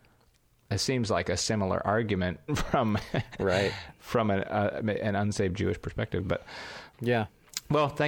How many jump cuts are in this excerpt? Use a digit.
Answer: 2